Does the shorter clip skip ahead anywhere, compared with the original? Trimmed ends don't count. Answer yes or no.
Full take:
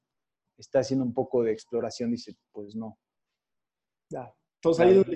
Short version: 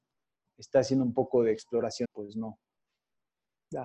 yes